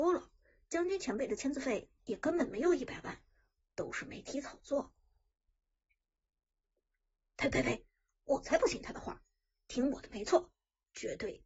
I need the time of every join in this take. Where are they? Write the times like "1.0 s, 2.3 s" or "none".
none